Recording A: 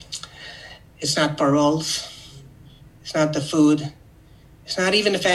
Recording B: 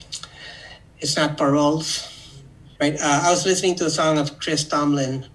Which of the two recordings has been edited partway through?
B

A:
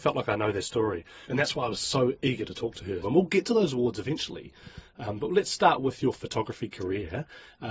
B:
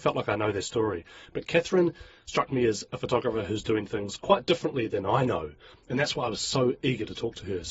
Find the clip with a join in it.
A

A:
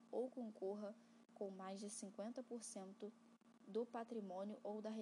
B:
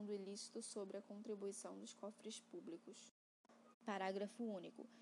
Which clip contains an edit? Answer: B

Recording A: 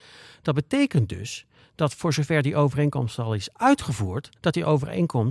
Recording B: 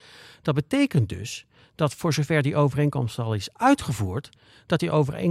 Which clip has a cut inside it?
A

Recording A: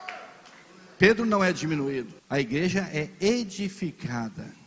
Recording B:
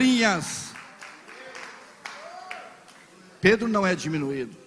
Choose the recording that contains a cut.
A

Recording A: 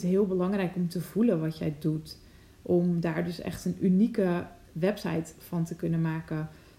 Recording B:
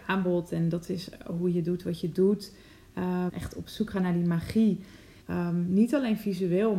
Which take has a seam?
B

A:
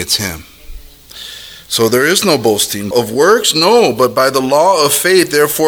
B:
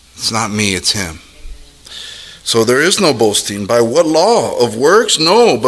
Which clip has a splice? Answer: A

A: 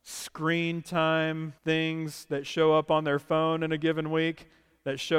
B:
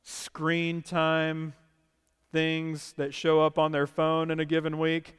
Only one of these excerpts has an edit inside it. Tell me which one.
A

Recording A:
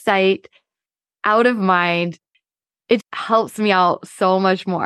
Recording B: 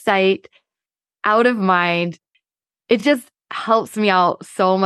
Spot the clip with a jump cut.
A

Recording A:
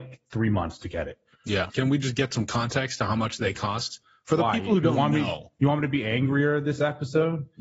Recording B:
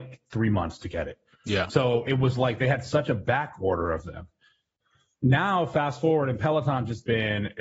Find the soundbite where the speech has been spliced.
A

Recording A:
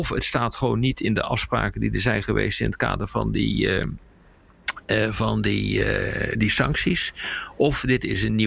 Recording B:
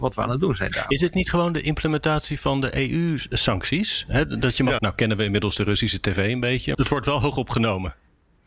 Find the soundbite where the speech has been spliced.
B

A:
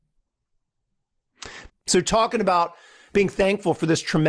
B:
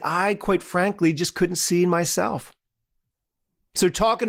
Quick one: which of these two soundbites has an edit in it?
A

